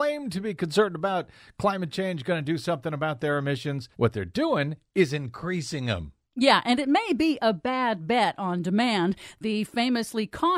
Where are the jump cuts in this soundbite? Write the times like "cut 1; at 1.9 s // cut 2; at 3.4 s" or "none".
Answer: cut 1; at 3.9 s